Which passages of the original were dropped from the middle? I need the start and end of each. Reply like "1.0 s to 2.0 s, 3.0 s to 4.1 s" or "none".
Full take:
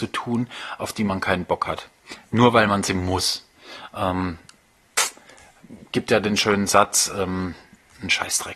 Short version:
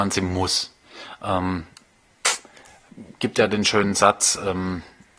none